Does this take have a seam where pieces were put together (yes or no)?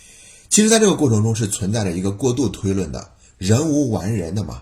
no